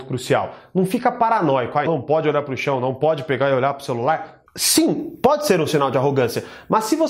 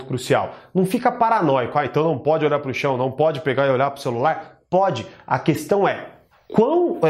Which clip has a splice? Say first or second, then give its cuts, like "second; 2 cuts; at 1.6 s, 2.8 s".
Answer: first; 2 cuts; at 1.9 s, 4.5 s